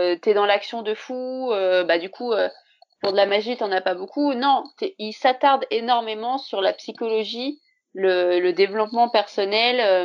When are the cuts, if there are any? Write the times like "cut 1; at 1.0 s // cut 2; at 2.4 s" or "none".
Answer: none